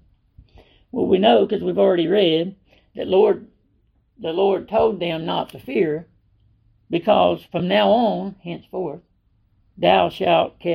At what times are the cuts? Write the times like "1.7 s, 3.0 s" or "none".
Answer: none